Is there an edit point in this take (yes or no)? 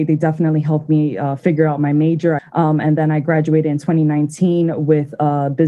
yes